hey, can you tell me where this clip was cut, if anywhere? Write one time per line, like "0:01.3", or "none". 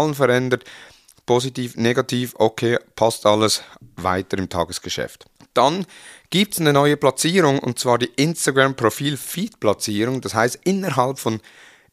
none